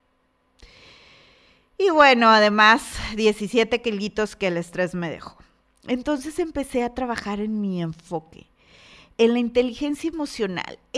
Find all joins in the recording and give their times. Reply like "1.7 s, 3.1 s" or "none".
none